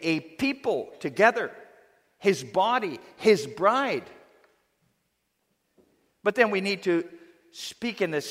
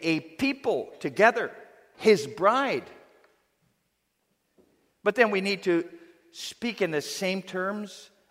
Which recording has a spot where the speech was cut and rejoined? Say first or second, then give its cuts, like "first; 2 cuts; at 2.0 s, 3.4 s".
second; 1 cut; at 1.9 s